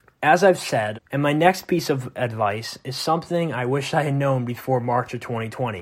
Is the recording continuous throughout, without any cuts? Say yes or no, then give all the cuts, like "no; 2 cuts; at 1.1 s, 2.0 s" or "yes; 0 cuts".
no; 1 cut; at 0.9 s